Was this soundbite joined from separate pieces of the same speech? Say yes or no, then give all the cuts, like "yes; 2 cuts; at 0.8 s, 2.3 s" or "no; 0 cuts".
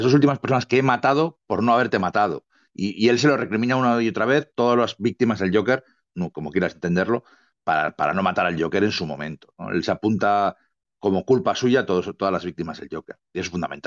yes; 1 cut; at 6.1 s